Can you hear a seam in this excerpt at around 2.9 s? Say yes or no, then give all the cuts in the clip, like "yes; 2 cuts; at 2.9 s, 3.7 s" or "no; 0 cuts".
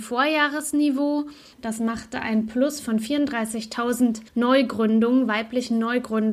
no; 2 cuts; at 1.5 s, 4.3 s